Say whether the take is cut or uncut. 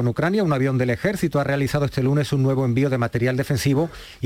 uncut